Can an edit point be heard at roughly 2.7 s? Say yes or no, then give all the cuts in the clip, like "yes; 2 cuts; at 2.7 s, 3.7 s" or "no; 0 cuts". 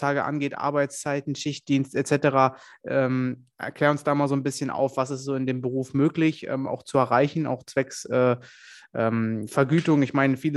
no; 0 cuts